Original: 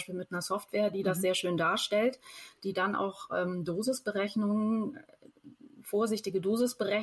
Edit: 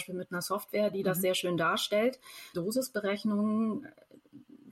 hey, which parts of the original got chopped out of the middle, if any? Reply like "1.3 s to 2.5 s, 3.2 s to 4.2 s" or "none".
2.5 s to 3.7 s